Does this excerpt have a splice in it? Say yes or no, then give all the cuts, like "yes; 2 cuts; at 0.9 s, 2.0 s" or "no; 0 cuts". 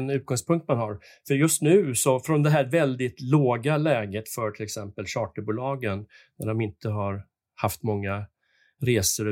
no; 0 cuts